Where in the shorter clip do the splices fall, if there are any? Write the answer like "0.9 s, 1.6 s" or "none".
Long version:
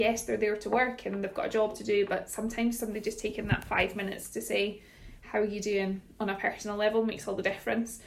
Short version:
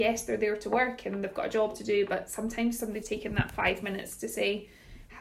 3.0 s